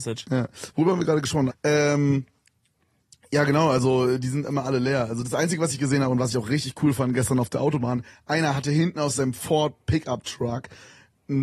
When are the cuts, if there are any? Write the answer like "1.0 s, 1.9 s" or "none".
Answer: 1.5 s